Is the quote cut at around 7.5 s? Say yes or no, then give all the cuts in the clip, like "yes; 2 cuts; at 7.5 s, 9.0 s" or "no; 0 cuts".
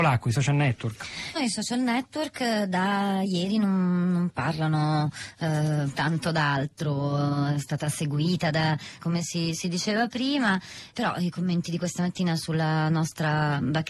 no; 3 cuts; at 1.4 s, 9.0 s, 10.9 s